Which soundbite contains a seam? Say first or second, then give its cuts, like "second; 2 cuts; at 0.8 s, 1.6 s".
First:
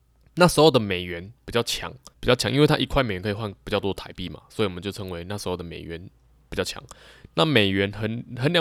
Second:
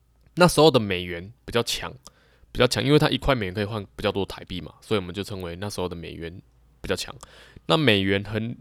first; 1 cut; at 2.1 s